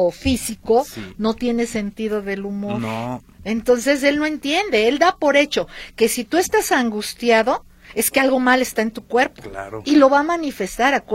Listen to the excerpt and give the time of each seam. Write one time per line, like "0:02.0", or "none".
0:03.3

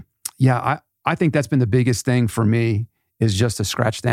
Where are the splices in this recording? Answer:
none

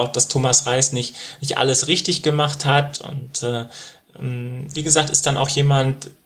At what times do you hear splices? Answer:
0:02.9
0:04.7

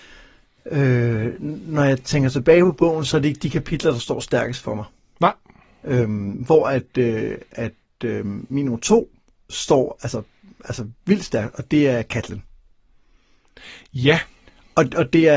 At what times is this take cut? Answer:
none

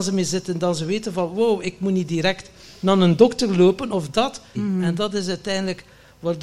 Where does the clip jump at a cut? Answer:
0:04.5

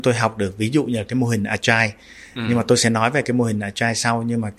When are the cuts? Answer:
none

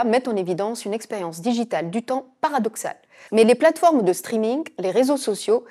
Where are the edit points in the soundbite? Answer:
0:03.3

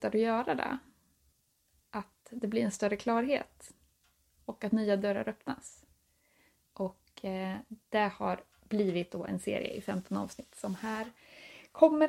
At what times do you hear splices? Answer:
0:06.6
0:08.5

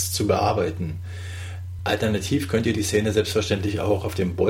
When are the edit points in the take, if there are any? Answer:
0:01.8

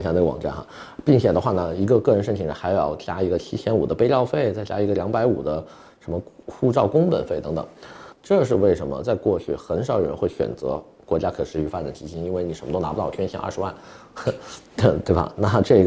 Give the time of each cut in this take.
0:08.1

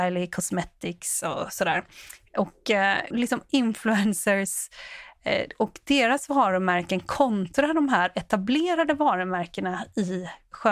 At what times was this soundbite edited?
0:03.1

